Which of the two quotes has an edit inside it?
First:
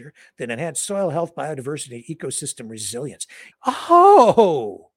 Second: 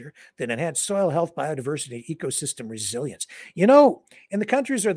first; 1 cut; at 3.5 s

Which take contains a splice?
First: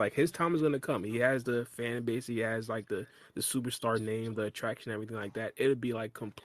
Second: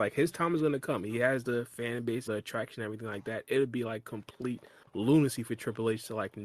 second; 1 cut; at 2.3 s

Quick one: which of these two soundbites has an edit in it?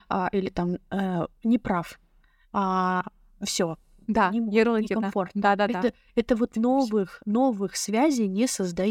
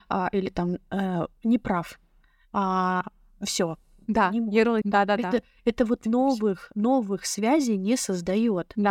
second; 1 cut; at 4.8 s

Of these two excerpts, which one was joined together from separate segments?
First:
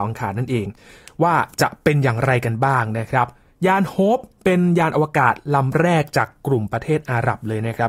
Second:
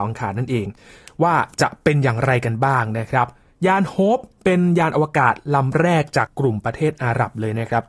second; 1 cut; at 6.3 s

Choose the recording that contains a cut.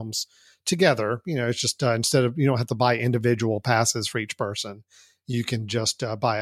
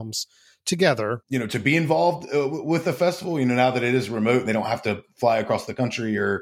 second; 1 cut; at 1.2 s

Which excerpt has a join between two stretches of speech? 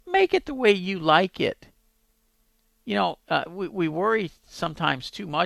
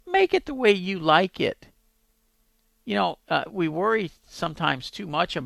second; 1 cut; at 3.5 s

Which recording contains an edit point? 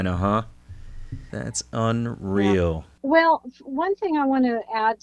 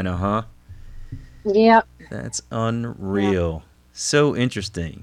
first; 2 cuts; at 1.3 s, 3.0 s

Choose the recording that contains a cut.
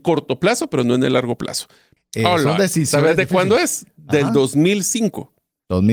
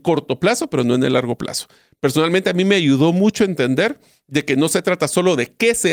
first; 1 cut; at 2.0 s

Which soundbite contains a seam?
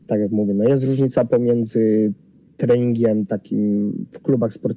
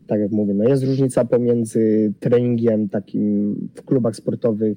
second; 1 cut; at 2.2 s

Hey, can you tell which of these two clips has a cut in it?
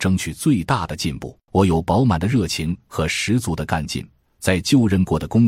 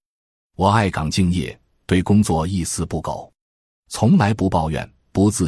first; 1 cut; at 1.5 s

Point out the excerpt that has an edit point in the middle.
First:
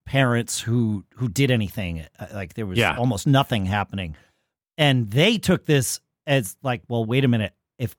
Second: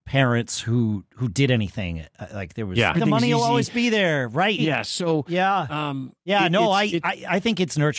second; 2 cuts; at 2.9 s, 4.6 s

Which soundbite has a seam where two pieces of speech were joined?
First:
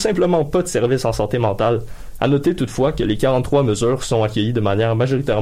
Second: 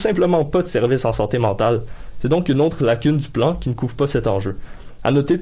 first; 1 cut; at 2.1 s

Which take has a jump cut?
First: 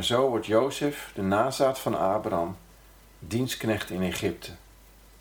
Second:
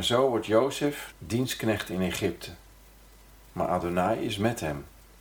second; 1 cut; at 1.1 s

